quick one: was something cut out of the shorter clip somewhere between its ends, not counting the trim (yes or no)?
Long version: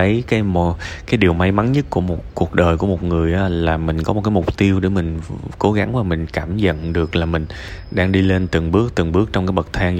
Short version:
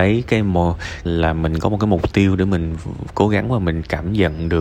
yes